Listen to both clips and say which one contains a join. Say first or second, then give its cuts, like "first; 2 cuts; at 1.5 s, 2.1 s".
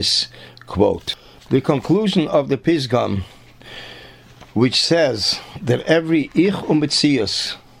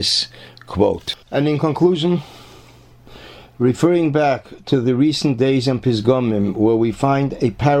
second; 1 cut; at 1.2 s